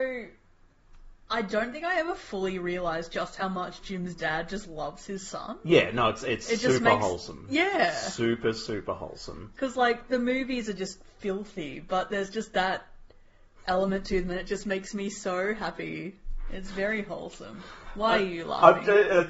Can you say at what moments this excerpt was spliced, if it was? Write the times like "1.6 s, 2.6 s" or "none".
none